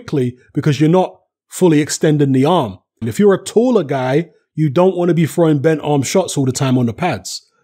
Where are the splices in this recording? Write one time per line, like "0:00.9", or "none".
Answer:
0:03.0